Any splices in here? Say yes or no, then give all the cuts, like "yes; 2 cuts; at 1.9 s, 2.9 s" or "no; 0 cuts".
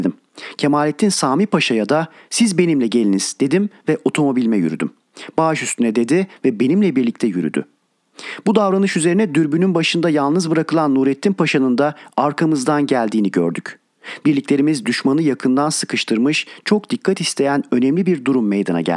yes; 1 cut; at 14.2 s